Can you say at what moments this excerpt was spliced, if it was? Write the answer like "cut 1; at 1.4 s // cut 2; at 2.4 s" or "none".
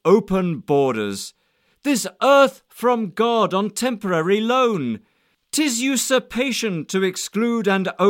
none